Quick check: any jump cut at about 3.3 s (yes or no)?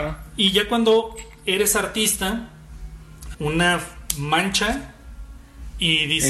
yes